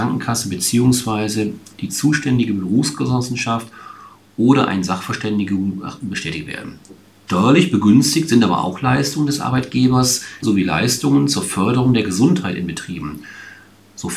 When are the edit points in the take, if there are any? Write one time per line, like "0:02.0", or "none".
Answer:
0:07.3
0:10.4